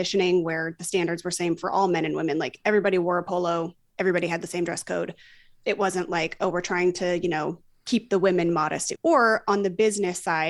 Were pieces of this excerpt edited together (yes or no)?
yes